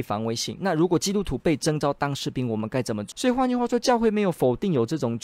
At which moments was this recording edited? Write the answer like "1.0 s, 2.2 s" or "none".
3.1 s